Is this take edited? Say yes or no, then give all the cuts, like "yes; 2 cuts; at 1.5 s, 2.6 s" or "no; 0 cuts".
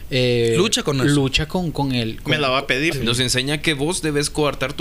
yes; 1 cut; at 2.9 s